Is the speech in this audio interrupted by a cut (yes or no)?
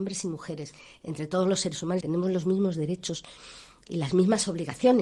yes